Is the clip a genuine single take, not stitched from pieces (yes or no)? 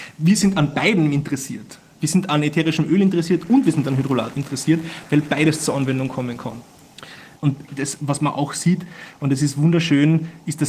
no